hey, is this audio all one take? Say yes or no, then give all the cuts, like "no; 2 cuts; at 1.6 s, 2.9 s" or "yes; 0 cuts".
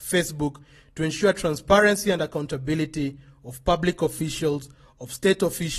yes; 0 cuts